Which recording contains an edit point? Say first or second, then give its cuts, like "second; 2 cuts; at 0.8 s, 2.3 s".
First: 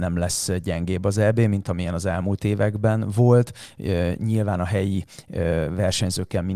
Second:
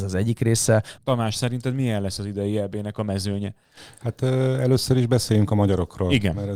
second; 1 cut; at 1.0 s